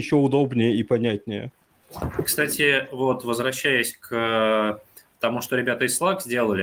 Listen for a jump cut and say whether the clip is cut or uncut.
uncut